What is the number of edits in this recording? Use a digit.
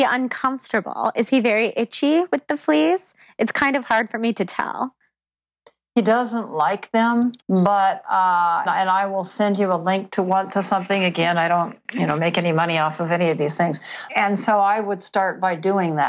3